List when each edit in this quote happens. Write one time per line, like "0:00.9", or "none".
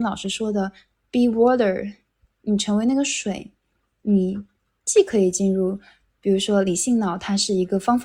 none